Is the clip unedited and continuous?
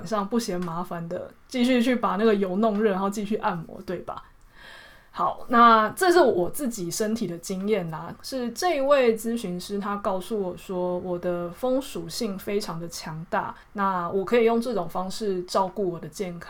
no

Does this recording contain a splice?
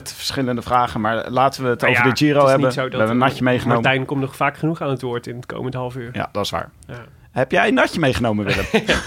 no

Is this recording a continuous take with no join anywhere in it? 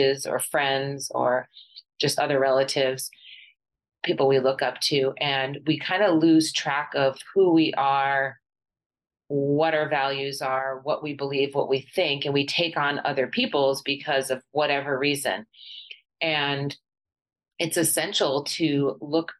yes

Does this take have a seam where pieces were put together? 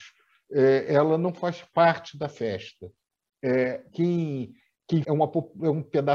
yes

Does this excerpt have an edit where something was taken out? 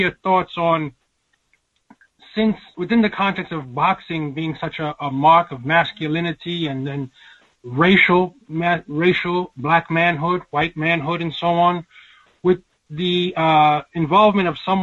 no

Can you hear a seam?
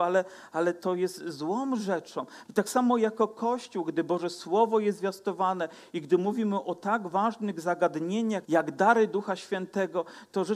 yes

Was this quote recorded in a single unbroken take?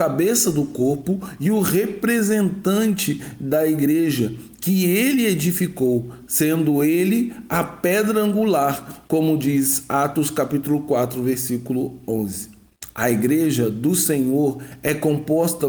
yes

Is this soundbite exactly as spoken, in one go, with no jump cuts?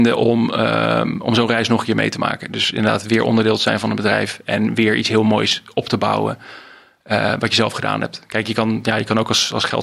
yes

